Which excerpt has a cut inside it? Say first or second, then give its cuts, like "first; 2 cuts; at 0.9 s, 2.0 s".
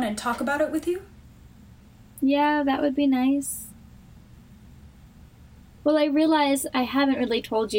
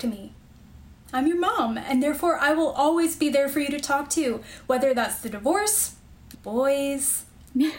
second; 1 cut; at 6.3 s